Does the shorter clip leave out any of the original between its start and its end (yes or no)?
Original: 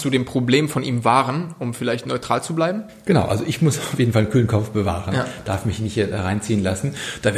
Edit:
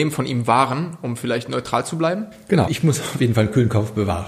yes